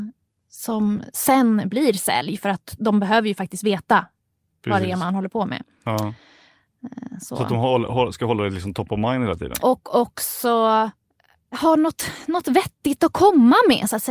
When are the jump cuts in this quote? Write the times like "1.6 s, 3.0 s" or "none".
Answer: 9.6 s